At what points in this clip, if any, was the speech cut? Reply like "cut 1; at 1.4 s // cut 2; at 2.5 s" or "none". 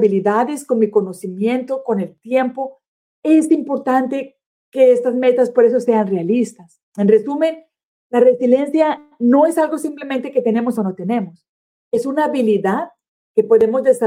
none